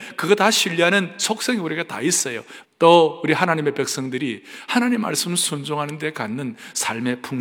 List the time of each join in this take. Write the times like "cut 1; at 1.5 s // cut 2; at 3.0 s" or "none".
cut 1; at 2.6 s